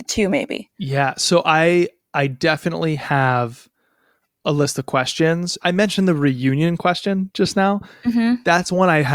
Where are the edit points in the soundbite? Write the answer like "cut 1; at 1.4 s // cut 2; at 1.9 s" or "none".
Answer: cut 1; at 5.6 s